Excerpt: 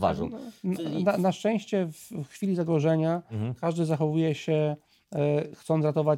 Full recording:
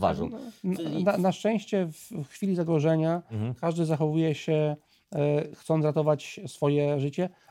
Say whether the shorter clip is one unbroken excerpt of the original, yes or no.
yes